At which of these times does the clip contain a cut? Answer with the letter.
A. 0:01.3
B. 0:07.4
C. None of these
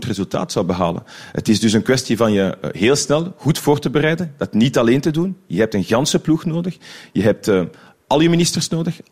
C